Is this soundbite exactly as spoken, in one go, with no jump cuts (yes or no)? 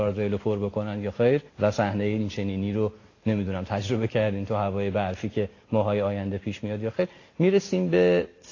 no